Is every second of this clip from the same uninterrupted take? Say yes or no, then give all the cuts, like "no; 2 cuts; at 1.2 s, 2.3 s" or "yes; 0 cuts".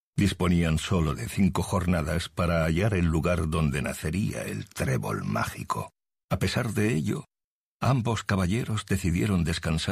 no; 1 cut; at 6.2 s